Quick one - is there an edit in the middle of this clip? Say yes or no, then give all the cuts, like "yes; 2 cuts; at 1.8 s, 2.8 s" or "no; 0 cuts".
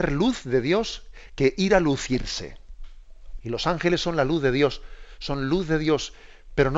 yes; 1 cut; at 3.4 s